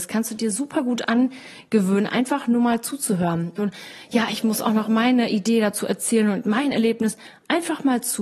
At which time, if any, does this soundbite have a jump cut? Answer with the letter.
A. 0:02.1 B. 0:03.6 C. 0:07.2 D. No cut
B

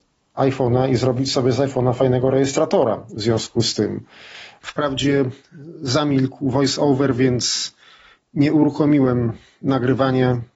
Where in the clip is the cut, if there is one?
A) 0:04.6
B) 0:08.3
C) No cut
A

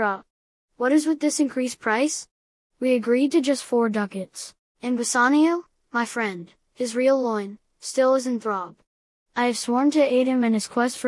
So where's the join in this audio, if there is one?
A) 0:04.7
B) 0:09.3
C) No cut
A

